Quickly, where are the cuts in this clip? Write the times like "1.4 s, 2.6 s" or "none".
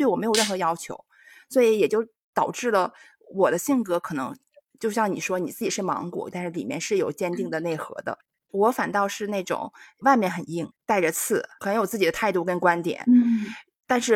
6.3 s

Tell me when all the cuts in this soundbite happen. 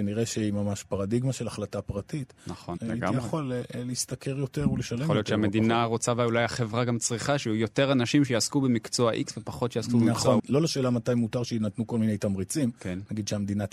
2.8 s, 10.4 s

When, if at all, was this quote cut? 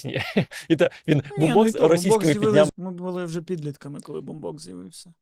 2.7 s

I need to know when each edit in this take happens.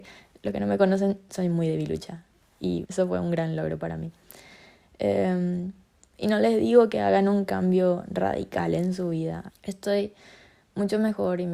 2.9 s, 9.5 s

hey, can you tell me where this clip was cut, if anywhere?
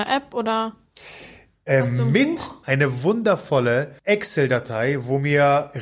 2.6 s, 4.0 s

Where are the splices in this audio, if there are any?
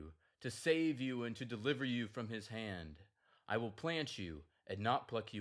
3.4 s

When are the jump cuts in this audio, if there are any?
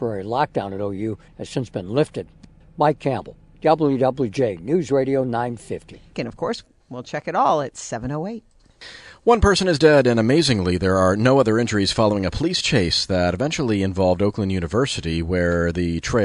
6.1 s

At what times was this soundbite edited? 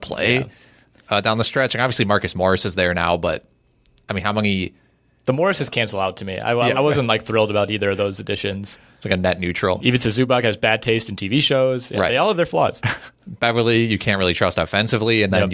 6.7 s, 9.8 s

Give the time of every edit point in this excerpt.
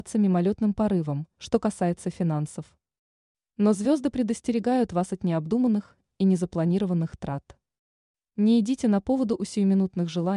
1.3 s

